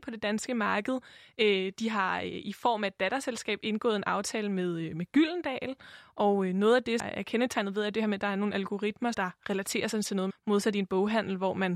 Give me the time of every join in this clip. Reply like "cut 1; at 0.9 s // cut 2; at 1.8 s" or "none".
cut 1; at 7.0 s // cut 2; at 9.1 s // cut 3; at 10.3 s